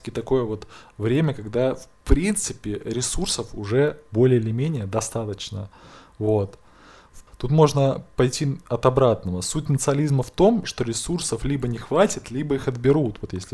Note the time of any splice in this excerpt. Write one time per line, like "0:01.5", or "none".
0:07.3
0:10.6